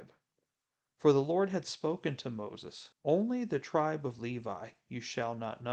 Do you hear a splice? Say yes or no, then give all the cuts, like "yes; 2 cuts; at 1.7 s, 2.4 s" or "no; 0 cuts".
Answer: yes; 1 cut; at 2.9 s